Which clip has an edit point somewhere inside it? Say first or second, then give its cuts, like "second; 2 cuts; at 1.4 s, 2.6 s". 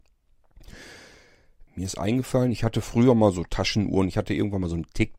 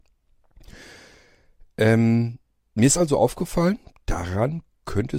first; 1 cut; at 1.7 s